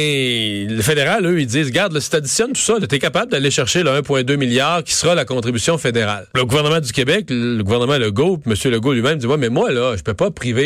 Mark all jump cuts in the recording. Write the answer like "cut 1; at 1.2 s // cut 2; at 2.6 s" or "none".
cut 1; at 6.3 s